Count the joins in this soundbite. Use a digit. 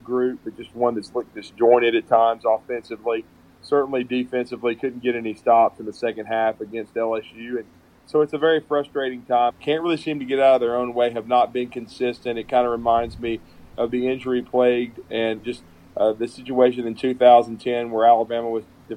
2